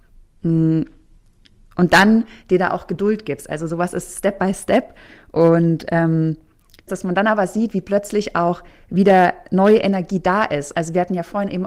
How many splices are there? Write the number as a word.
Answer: one